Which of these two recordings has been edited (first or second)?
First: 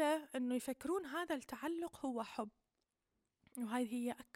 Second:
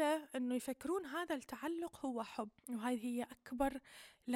second